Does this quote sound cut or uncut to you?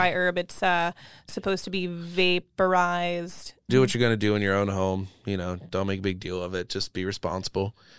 cut